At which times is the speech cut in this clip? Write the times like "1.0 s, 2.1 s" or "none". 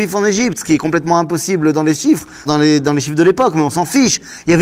2.5 s

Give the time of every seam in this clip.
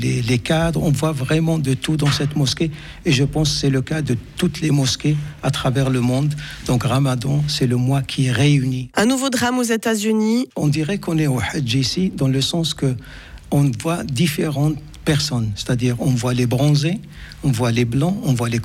8.9 s, 10.5 s

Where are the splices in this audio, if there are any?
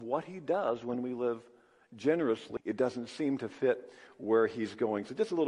2.6 s

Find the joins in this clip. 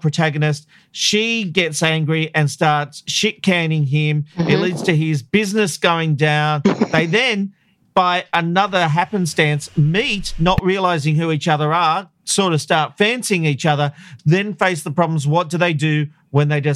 none

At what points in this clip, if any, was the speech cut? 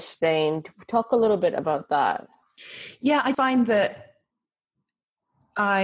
3.3 s

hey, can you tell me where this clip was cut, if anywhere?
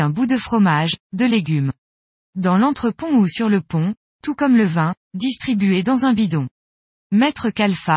4.1 s, 7.0 s

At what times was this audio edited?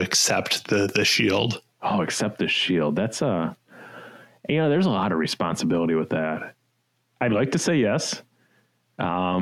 none

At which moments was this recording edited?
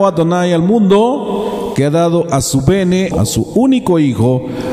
3.1 s

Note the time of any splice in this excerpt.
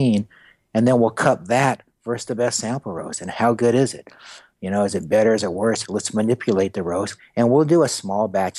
5.8 s, 7.2 s

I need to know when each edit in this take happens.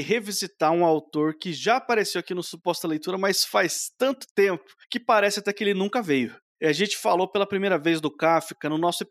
none

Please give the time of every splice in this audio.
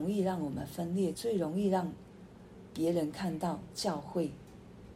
1.1 s

